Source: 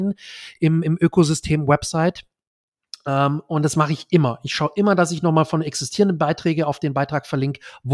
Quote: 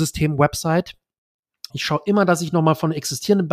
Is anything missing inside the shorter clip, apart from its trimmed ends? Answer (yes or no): yes